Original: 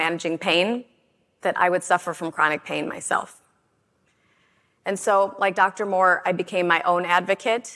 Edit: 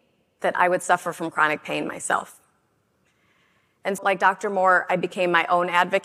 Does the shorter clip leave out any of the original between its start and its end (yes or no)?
yes